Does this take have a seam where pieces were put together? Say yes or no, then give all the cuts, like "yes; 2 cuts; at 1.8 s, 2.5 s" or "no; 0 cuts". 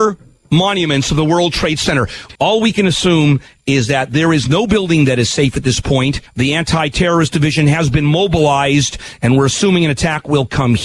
yes; 2 cuts; at 2.4 s, 6.3 s